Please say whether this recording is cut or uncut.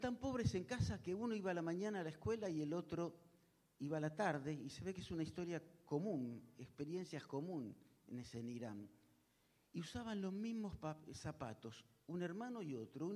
uncut